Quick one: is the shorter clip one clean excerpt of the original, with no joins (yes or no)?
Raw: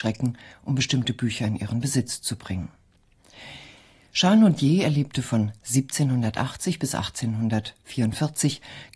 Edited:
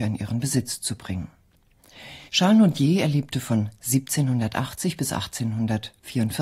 no